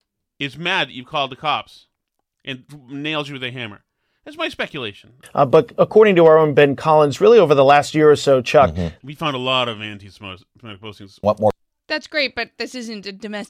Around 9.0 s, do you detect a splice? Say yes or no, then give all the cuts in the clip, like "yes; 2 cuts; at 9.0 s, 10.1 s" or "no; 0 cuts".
yes; 3 cuts; at 5.2 s, 9.0 s, 11.2 s